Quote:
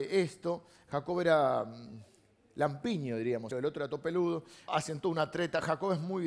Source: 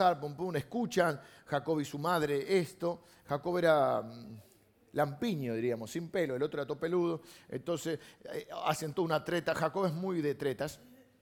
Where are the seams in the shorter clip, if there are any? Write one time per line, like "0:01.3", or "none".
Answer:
0:03.5
0:04.7